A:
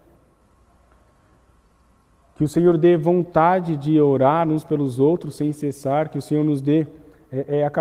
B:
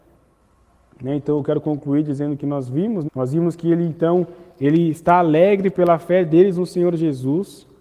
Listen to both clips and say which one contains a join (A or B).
B